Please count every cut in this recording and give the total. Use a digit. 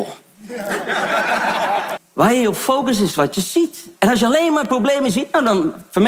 2